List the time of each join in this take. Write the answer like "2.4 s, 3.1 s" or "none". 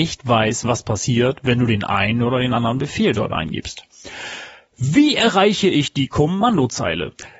none